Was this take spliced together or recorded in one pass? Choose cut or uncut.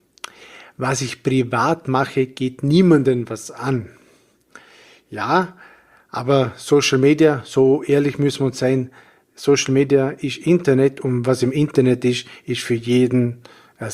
uncut